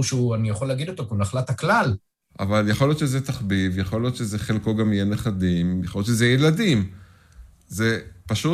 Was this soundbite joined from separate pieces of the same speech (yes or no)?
yes